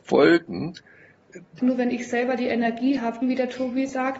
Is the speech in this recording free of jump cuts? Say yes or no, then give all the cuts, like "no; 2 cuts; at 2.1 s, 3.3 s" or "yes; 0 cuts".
no; 2 cuts; at 1.6 s, 3.2 s